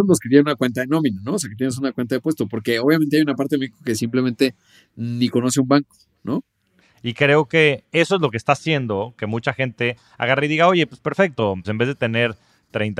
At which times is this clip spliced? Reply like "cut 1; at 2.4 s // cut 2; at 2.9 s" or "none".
cut 1; at 6.8 s // cut 2; at 11.6 s